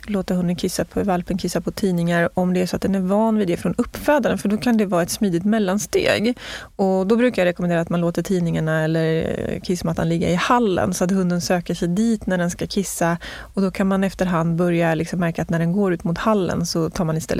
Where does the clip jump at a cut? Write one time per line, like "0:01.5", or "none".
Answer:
none